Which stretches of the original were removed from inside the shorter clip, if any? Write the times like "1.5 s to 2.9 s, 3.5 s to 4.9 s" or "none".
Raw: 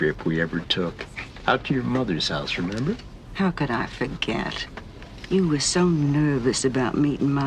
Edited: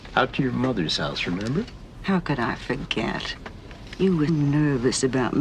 5.6 s to 5.9 s